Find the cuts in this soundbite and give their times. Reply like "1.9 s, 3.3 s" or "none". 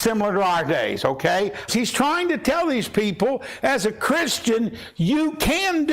1.7 s